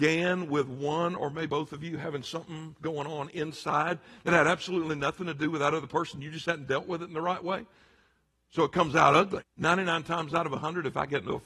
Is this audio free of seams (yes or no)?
no